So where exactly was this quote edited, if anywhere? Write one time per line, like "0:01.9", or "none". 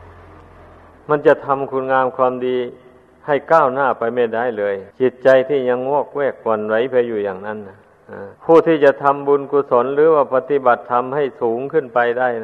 0:04.9
0:08.3